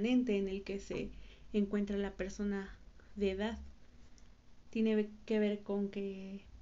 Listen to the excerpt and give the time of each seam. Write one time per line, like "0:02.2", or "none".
0:04.6